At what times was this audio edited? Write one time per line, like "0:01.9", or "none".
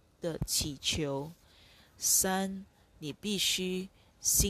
none